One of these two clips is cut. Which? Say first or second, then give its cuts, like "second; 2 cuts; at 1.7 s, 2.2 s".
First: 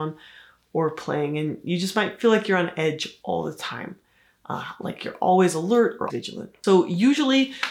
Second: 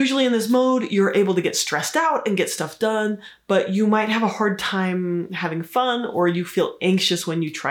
first; 1 cut; at 6.1 s